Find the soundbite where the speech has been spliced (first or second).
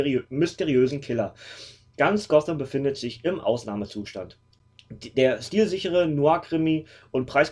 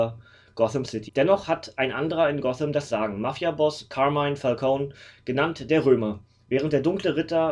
second